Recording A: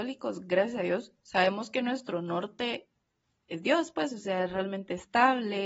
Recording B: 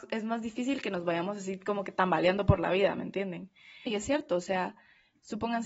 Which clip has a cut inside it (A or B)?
B